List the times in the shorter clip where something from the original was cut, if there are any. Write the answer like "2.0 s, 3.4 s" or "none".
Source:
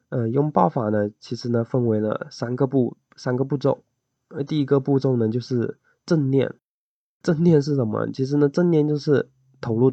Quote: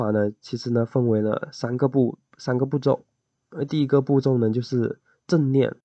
none